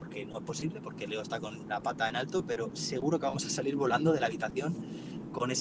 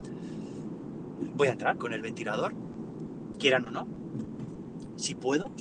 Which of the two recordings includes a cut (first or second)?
second